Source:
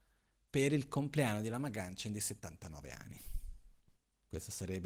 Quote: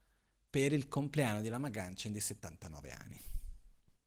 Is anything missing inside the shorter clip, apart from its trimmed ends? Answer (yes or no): no